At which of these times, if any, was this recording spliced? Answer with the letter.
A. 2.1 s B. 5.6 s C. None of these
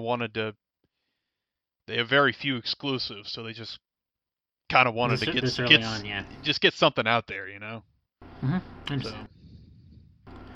C